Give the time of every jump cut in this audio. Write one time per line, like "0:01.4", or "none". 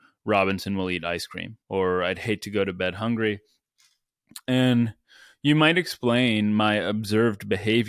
0:01.6

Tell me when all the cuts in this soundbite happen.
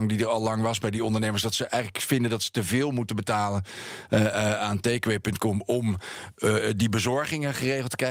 none

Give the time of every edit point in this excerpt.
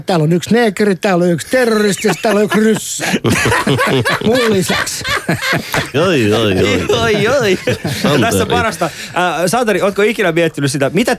0:05.9

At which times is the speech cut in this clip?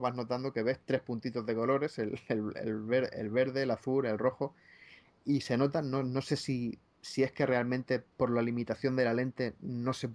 0:08.1

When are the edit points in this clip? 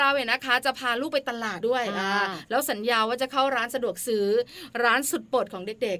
0:01.6

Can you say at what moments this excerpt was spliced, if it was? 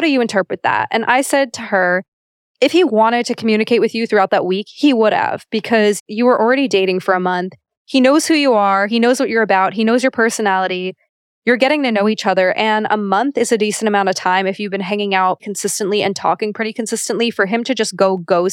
0:02.5
0:15.4

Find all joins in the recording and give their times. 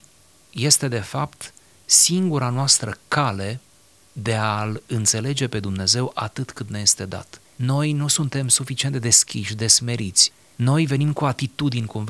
0:07.5

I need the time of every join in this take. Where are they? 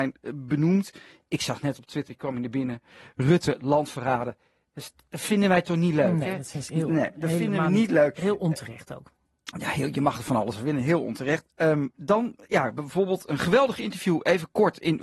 none

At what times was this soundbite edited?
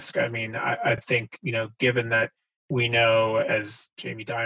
none

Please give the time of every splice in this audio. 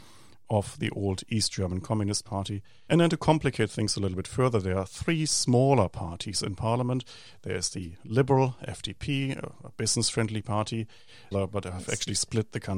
0:02.9
0:11.3

